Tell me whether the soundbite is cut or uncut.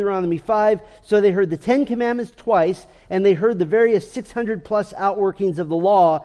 uncut